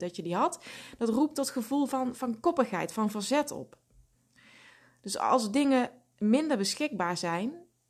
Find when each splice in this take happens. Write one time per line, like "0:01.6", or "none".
none